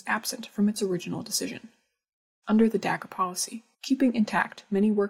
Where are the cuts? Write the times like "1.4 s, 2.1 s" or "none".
2.4 s, 3.7 s